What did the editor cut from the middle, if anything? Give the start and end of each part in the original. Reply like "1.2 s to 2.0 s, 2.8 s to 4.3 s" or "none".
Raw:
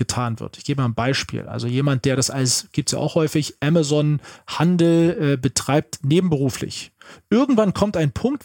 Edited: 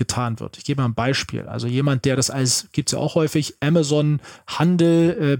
none